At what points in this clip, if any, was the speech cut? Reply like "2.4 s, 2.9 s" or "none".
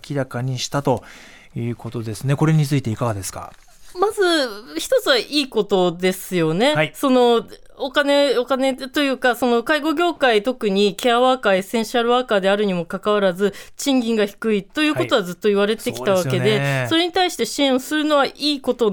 none